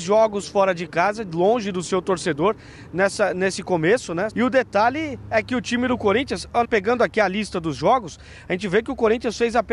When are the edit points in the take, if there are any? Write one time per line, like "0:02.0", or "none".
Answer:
0:04.3
0:06.6